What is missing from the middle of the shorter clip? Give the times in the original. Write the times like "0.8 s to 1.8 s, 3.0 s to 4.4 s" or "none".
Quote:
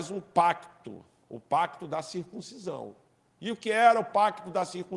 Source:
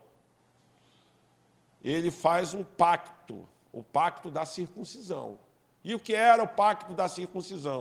none

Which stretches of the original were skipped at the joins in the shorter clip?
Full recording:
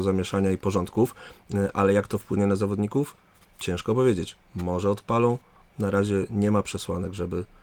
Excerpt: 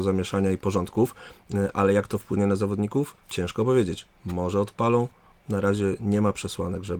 3.2 s to 3.5 s

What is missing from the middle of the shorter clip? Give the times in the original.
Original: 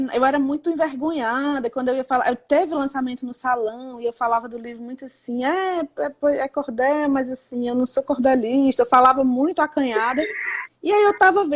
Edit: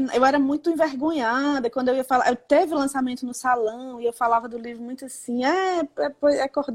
none

